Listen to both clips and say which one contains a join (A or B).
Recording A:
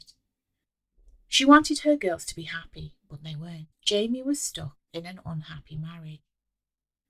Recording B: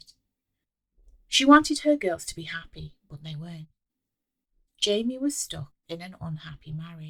A